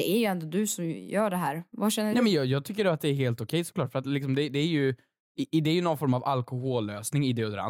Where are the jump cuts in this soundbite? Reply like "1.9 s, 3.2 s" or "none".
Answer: none